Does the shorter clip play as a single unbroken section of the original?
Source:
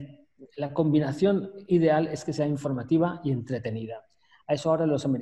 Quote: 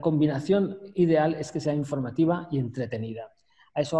yes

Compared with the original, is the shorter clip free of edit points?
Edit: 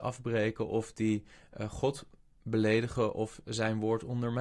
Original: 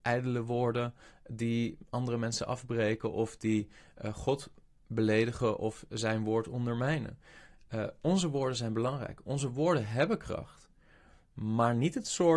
yes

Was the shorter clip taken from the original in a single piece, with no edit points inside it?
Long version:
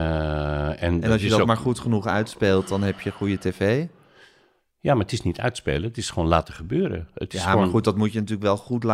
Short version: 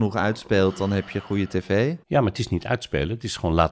no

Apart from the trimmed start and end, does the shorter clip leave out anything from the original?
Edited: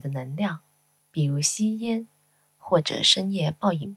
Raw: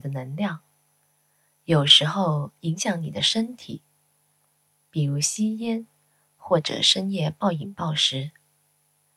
yes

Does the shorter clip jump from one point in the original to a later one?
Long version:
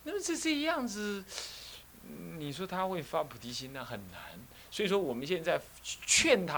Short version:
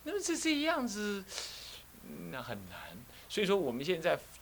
yes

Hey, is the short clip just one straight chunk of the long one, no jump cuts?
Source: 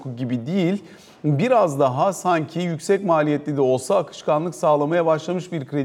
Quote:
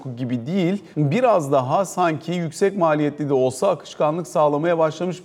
no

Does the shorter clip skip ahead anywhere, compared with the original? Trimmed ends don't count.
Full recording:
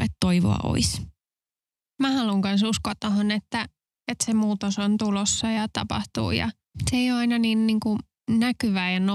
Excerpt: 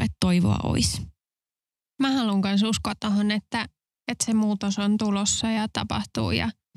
no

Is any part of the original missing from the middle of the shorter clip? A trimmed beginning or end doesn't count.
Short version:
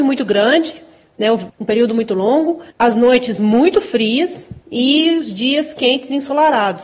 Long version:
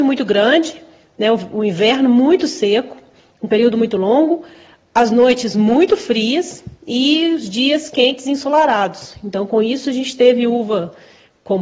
yes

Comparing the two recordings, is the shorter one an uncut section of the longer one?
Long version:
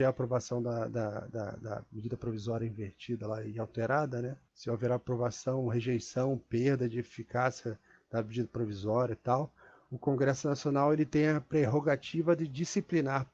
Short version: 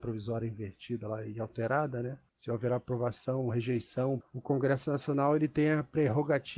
no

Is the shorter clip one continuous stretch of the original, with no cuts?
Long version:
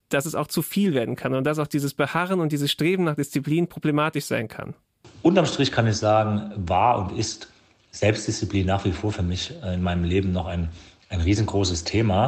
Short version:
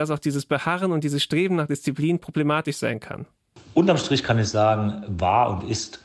yes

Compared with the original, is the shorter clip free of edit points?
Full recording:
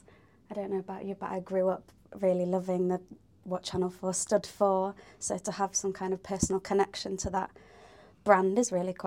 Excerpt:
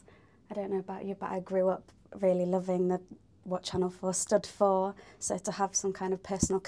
yes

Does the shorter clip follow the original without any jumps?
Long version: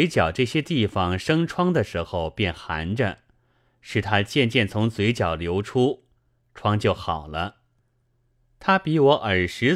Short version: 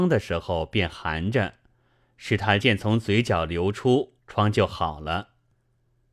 no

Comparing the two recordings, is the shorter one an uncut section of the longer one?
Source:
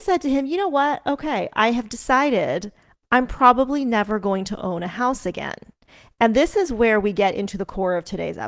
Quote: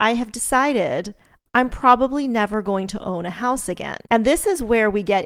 no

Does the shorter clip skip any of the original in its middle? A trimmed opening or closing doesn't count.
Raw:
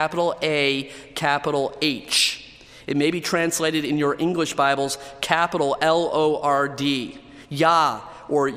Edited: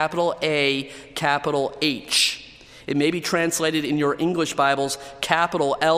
no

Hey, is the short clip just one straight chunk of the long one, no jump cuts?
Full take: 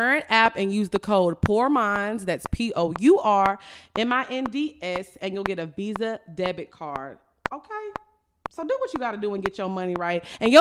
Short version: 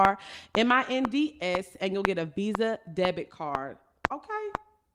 yes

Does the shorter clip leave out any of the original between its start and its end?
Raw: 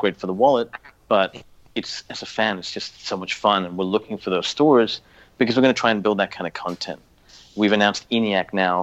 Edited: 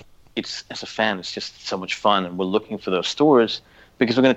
no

